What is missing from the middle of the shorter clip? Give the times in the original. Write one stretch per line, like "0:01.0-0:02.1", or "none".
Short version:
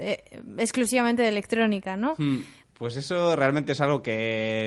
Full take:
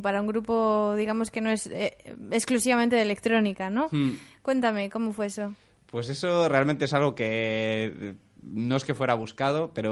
0:04.4-0:05.8